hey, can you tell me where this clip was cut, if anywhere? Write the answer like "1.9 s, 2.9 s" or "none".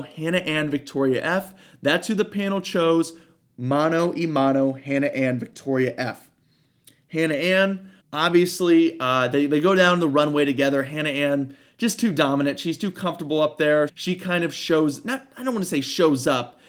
8.0 s, 13.9 s